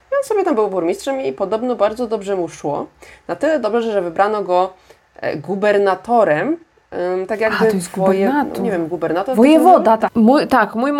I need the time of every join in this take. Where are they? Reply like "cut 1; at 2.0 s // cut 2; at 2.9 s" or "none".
cut 1; at 10.1 s